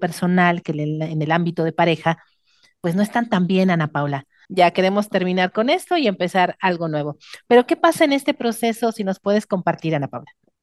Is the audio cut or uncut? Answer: cut